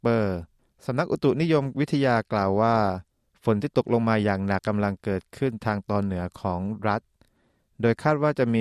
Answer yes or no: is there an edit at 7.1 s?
no